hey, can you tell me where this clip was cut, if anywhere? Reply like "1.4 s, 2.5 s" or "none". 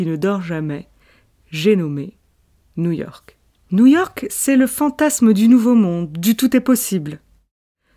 none